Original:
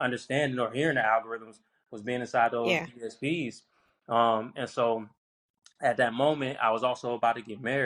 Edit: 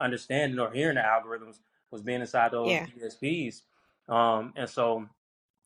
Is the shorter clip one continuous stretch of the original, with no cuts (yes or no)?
yes